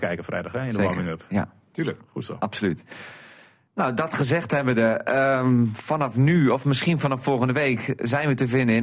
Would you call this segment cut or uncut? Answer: uncut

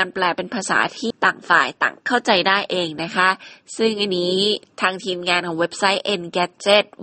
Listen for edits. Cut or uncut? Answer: cut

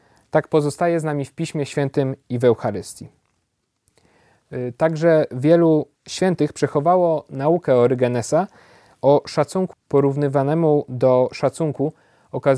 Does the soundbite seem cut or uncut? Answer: cut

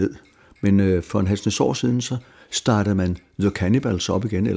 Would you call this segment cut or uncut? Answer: uncut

